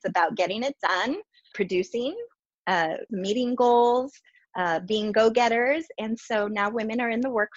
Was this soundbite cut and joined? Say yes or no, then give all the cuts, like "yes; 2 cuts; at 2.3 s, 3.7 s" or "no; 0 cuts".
yes; 2 cuts; at 1.5 s, 3.1 s